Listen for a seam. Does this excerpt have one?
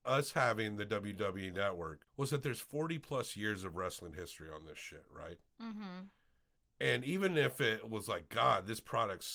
no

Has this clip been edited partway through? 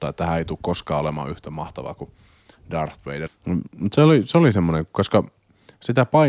yes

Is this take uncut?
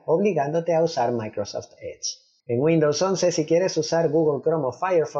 yes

